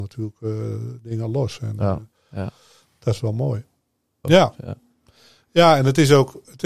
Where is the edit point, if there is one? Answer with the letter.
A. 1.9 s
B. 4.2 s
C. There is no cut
B